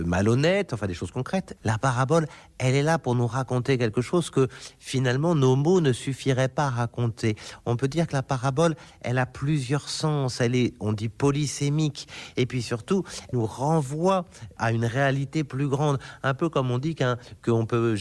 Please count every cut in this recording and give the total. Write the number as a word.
two